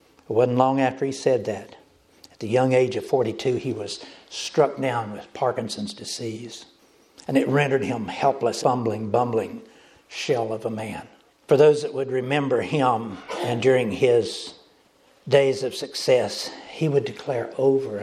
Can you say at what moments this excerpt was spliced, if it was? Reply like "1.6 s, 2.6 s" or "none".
8.6 s, 11.3 s